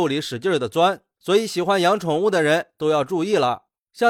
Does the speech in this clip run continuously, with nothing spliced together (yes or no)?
yes